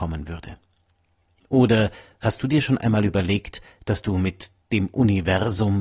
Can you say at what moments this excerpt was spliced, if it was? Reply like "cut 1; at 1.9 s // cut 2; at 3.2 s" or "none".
none